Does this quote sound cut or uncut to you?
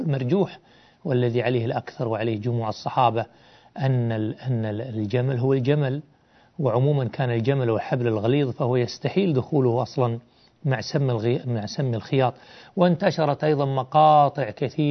uncut